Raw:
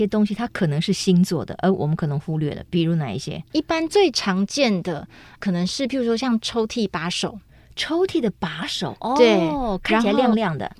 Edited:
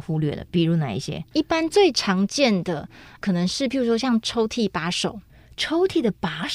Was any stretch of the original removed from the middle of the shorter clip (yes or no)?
no